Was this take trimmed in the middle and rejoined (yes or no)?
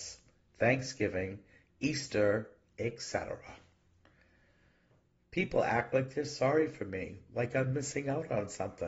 no